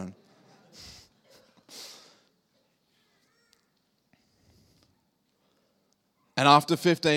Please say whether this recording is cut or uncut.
uncut